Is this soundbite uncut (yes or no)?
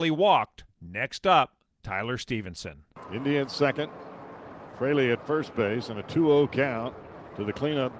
yes